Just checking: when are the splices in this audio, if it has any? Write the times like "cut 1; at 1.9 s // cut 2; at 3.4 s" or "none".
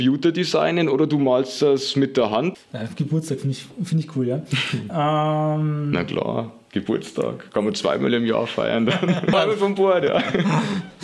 cut 1; at 2.5 s // cut 2; at 9.3 s